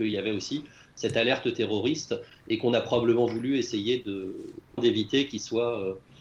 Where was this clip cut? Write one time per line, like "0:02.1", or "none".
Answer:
0:04.8